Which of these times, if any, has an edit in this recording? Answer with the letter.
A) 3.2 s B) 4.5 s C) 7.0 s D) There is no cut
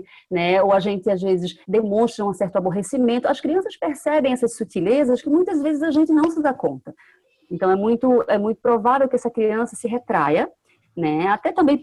D